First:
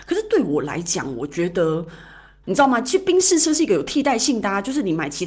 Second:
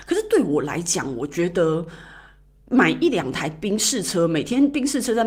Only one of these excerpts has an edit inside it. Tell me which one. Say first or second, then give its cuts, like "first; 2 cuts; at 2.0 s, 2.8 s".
first; 1 cut; at 2.4 s